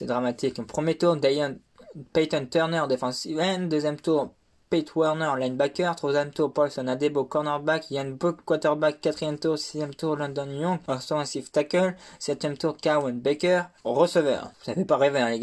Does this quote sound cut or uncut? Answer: cut